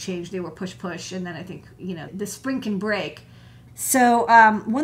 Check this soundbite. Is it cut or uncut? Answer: cut